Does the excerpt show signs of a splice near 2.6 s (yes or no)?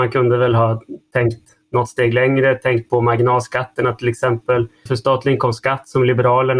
no